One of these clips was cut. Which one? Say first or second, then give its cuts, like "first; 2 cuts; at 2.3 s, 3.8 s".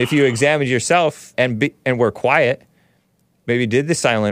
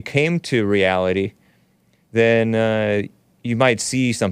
first; 1 cut; at 1.3 s